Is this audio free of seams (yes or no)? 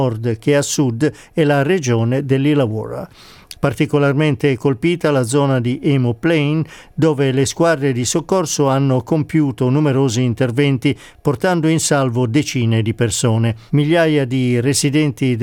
no